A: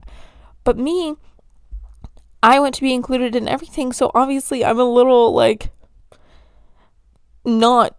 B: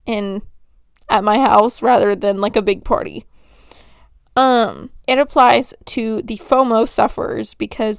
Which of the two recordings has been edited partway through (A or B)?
B